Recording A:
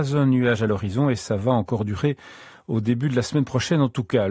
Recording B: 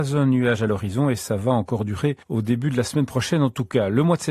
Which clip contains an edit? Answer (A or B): B